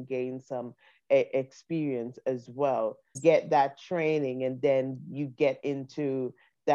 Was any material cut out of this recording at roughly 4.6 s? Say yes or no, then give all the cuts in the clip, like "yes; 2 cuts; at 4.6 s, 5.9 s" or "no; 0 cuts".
no; 1 cut; at 3.1 s